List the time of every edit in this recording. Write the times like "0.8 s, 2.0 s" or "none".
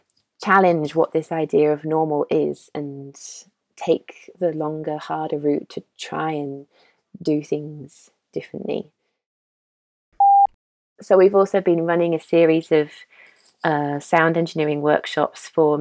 none

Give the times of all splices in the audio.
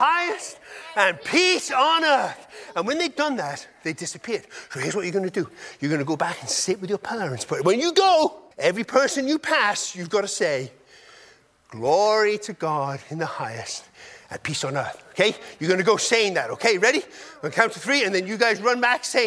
8.5 s

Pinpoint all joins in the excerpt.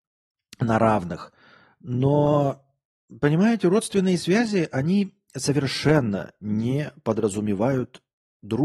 none

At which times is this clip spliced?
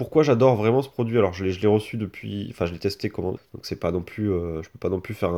3.4 s

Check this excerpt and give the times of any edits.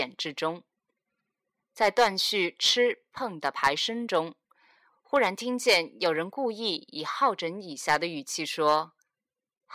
1.6 s

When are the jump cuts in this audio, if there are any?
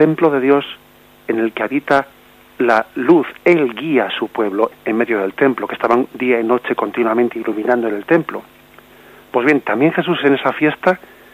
4.7 s

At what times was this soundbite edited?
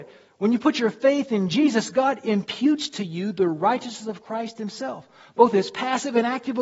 none

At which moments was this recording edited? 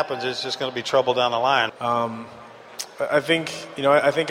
1.7 s

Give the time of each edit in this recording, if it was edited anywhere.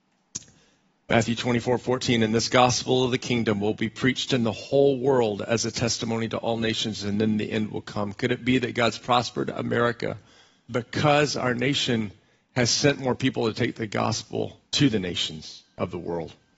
10.7 s, 14.7 s

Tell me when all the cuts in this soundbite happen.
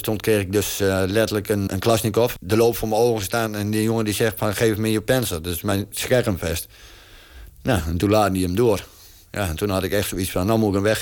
1.7 s, 7.5 s

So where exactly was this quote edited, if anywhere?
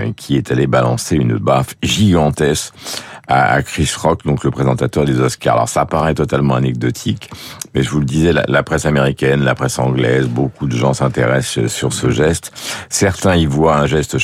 none

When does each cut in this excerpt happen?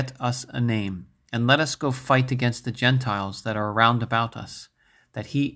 none

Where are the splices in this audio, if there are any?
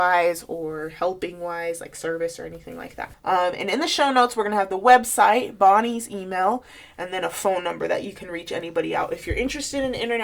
3.1 s

